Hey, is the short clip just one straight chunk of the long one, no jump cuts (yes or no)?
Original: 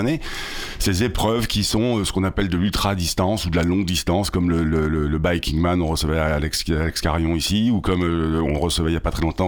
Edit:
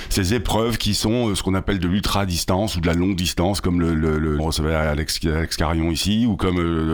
no